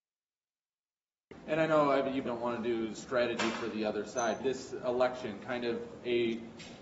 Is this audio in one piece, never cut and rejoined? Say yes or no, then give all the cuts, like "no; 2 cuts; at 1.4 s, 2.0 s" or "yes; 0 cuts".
no; 2 cuts; at 2.2 s, 4.4 s